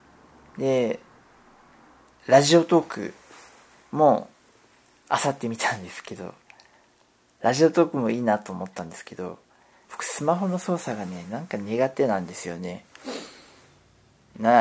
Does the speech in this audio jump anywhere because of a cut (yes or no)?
yes